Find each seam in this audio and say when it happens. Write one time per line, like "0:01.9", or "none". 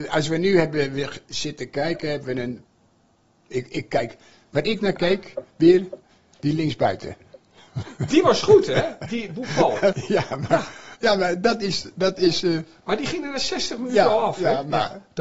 0:09.9

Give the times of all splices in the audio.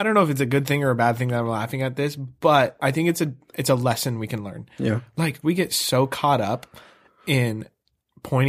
0:05.4

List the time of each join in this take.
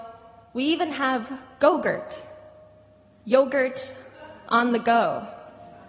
none

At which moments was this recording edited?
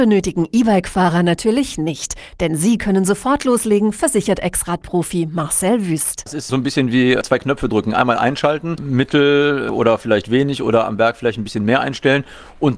0:08.8

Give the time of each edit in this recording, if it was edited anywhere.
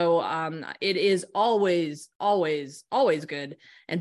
none

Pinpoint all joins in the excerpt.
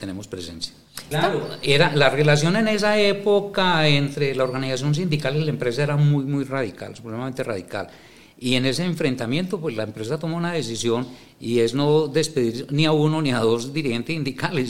0:01.1

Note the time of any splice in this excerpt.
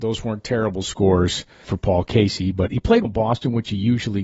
0:01.6
0:03.0

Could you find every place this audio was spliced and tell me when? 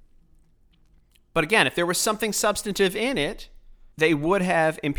0:03.9

